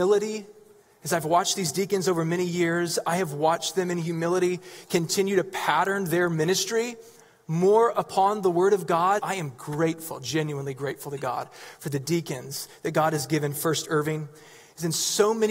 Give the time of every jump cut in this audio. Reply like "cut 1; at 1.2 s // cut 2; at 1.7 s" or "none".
cut 1; at 9.2 s